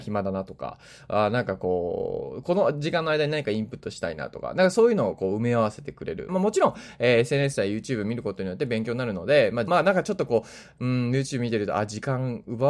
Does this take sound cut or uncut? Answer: cut